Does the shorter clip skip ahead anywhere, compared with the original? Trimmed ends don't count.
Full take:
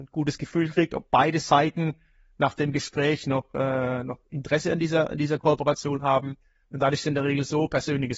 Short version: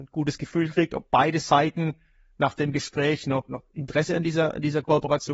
yes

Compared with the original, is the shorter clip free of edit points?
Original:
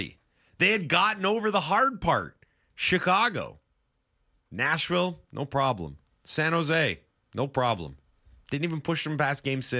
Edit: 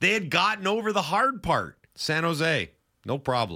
no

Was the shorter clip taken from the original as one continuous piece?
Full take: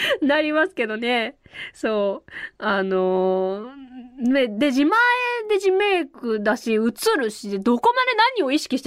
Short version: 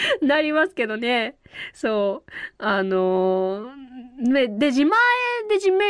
yes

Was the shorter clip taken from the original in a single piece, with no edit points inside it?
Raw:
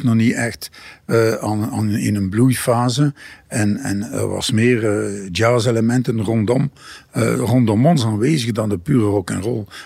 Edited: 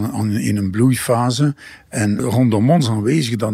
no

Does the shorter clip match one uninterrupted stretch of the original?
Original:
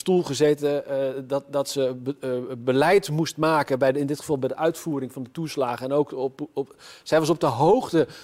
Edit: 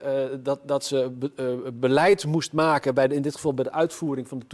yes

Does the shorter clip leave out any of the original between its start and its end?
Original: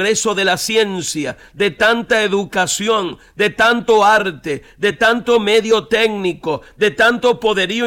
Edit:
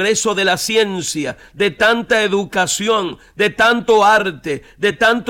no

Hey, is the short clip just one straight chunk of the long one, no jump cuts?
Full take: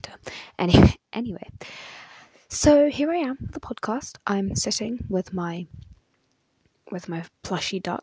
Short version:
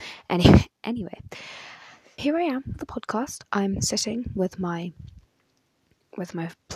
no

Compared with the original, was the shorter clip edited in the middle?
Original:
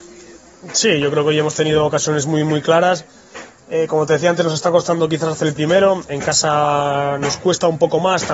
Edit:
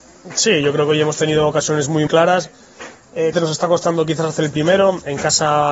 yes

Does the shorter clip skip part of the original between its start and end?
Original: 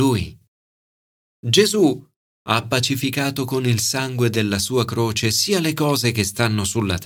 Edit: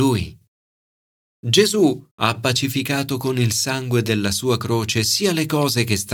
yes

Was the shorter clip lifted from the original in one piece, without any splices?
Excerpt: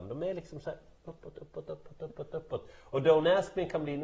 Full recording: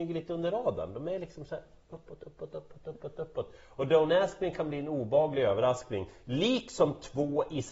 yes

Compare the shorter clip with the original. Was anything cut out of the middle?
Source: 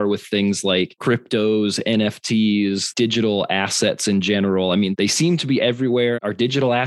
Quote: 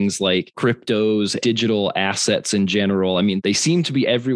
yes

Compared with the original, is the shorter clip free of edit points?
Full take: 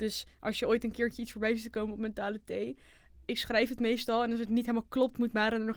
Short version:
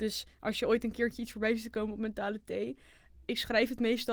yes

